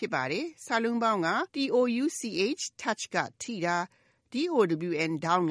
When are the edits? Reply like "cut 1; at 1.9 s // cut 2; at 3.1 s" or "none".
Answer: cut 1; at 1.5 s